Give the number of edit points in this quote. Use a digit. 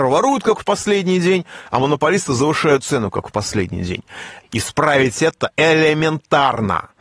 1